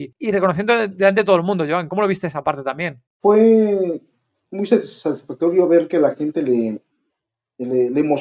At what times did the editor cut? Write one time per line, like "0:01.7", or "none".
none